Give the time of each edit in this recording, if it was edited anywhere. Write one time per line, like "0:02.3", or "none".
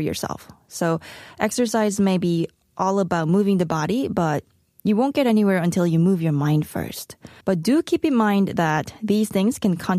0:07.4